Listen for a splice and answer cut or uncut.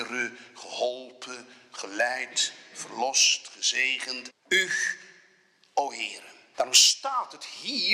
cut